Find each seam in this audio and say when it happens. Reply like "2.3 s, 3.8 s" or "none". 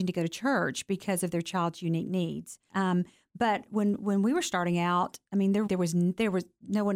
2.7 s, 5.7 s